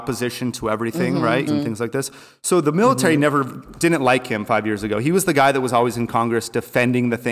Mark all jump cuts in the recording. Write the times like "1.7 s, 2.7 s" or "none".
1.5 s